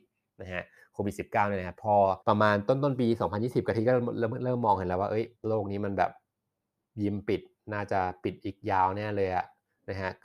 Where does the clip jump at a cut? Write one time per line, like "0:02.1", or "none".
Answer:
0:02.2
0:05.4